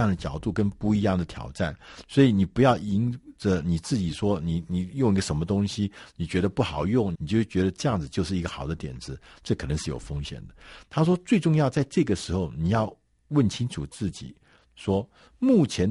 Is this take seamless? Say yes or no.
no